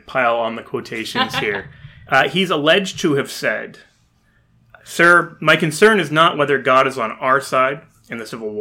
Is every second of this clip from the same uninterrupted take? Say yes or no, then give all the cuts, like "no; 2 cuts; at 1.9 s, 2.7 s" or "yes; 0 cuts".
yes; 0 cuts